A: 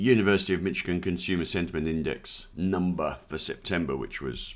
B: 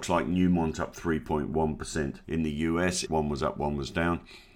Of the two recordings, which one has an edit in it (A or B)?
B